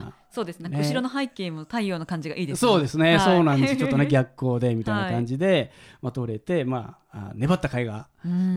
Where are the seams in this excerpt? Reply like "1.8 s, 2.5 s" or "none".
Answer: none